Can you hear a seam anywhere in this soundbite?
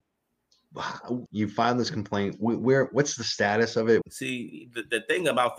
yes; 2 cuts; at 1.3 s, 4.0 s

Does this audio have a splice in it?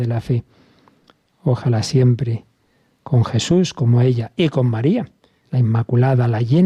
yes; 1 cut; at 5.4 s

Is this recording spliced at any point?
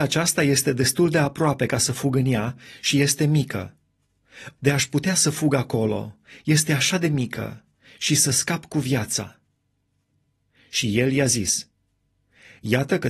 yes; 1 cut; at 4.6 s

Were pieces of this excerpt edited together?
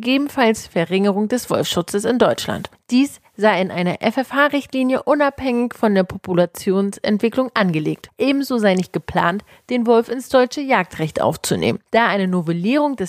no; 0 cuts

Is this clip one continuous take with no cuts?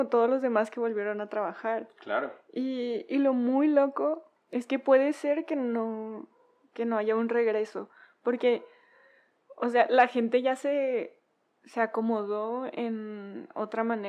no; 1 cut; at 4.4 s

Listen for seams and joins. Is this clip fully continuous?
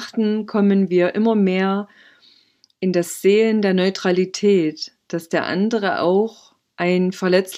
yes; 0 cuts

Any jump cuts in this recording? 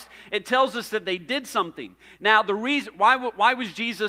no; 0 cuts

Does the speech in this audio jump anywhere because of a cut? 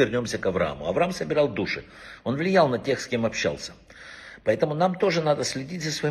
no; 0 cuts

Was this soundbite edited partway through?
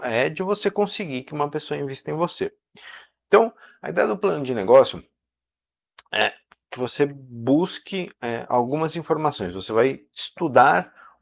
no; 0 cuts

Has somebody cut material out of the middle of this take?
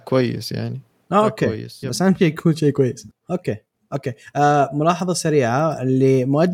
yes; 1 cut; at 1.8 s

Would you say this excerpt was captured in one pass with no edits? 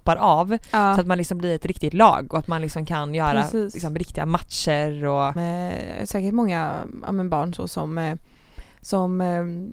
no; 1 cut; at 5.4 s

